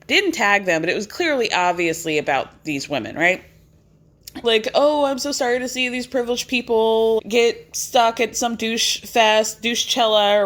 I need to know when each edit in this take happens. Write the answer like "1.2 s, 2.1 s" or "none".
4.4 s, 7.2 s